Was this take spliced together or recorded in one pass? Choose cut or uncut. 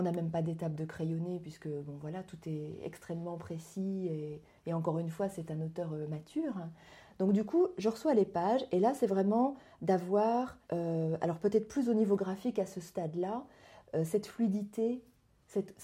cut